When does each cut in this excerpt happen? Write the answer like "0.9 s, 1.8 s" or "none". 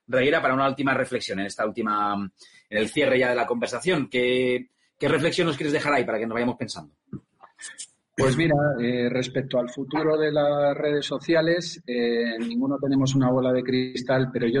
none